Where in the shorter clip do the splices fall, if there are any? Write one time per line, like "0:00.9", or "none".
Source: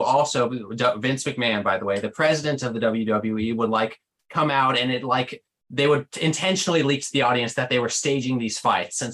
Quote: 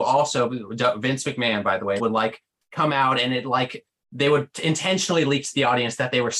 0:02.0

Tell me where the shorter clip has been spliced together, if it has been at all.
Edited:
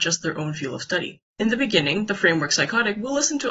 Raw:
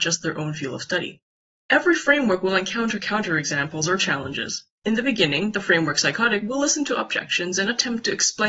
0:01.3

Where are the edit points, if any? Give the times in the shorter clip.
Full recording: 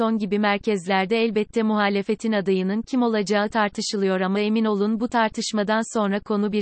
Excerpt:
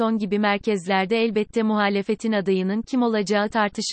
none

